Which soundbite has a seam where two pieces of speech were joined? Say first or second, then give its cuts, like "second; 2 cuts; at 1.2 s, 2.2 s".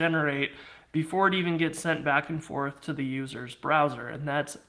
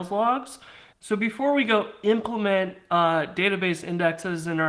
second; 1 cut; at 0.9 s